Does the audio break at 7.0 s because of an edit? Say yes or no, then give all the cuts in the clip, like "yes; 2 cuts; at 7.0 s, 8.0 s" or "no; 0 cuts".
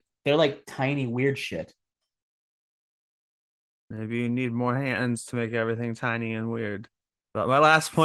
no; 0 cuts